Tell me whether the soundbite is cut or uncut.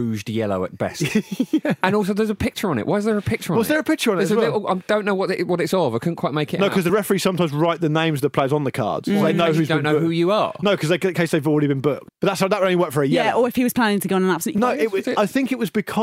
cut